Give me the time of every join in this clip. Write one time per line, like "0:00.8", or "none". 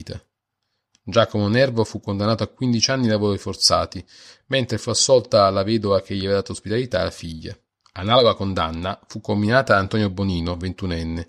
0:07.8